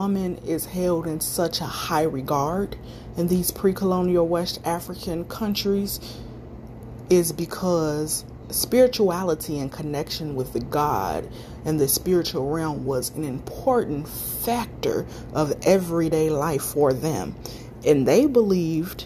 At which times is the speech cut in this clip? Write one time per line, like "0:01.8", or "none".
none